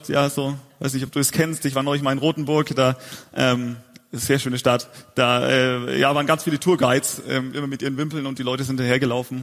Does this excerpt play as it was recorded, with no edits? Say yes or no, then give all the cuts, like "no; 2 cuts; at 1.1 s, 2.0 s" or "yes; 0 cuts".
yes; 0 cuts